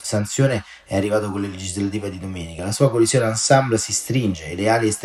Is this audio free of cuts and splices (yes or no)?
yes